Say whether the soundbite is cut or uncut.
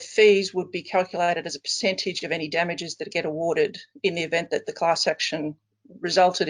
uncut